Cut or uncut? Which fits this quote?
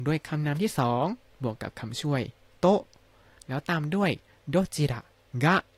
uncut